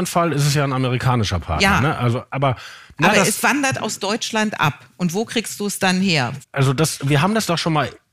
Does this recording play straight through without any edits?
no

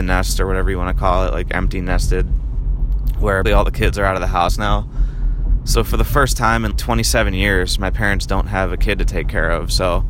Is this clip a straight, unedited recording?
no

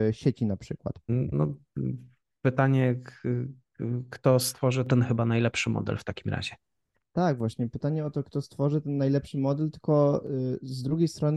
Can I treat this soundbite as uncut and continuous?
no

